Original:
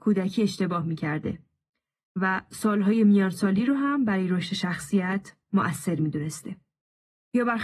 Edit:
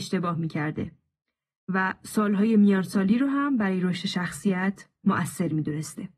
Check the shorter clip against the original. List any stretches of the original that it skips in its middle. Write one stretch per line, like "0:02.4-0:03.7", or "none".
none